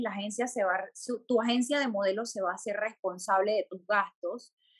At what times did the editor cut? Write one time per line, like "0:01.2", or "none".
none

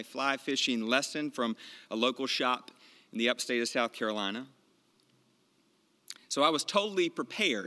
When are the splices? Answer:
none

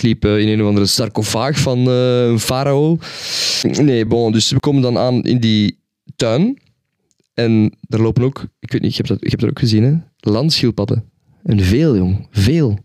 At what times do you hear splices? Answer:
none

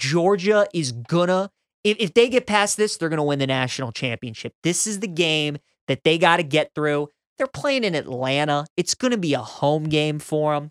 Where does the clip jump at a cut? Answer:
none

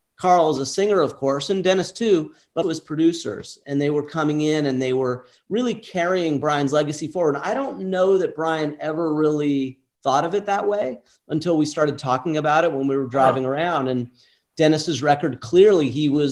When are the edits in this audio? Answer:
0:02.6

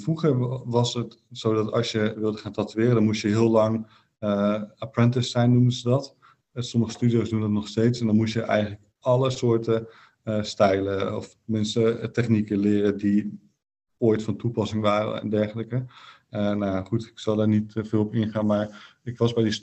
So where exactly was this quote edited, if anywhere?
none

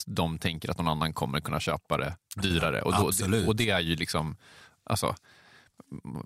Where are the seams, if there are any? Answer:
none

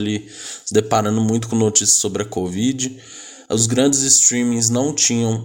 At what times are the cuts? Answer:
none

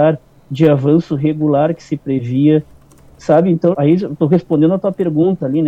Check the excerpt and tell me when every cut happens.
0:03.7

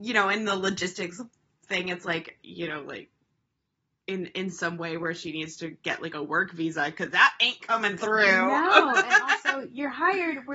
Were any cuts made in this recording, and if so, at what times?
0:02.4

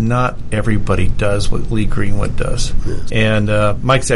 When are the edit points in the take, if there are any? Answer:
0:03.1

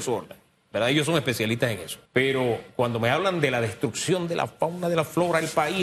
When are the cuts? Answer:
0:02.1

